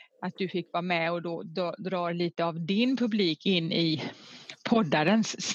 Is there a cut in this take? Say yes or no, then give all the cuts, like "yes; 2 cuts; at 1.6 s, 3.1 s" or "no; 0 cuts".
no; 0 cuts